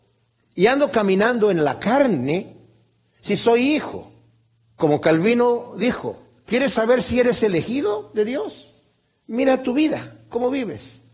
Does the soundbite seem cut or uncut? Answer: cut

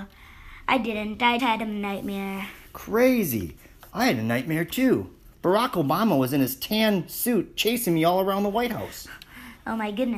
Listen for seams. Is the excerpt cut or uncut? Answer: cut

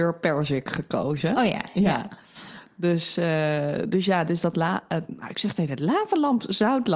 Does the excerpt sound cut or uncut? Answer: uncut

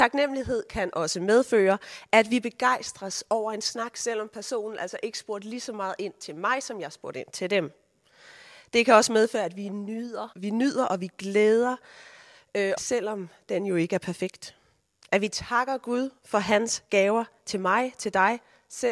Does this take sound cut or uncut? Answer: cut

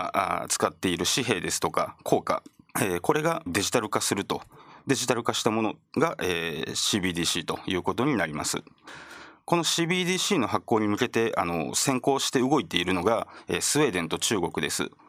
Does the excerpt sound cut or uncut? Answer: cut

